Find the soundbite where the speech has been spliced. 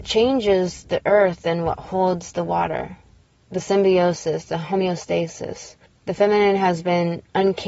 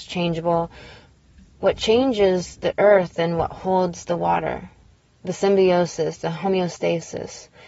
first; 1 cut; at 5.9 s

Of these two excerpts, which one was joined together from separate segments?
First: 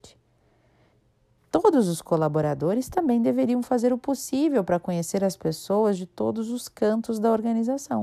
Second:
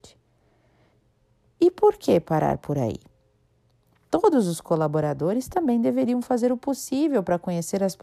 first; 1 cut; at 1.4 s

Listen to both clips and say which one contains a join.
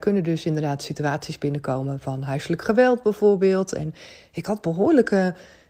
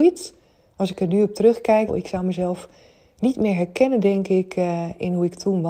second; 1 cut; at 1.9 s

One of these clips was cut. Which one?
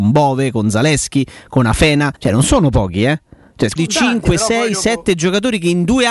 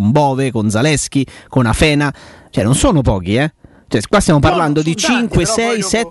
first; 2 cuts; at 2.2 s, 3.8 s

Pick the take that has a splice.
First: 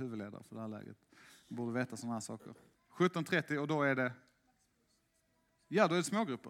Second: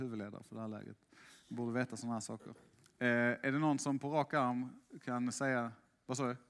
first; 1 cut; at 2.7 s

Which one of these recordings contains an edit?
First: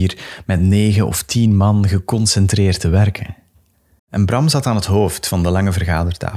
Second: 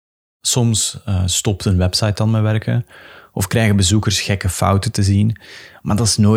first; 1 cut; at 4.0 s

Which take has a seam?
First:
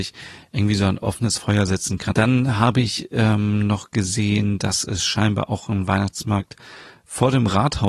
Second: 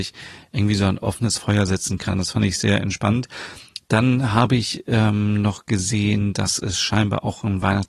first; 1 cut; at 2.1 s

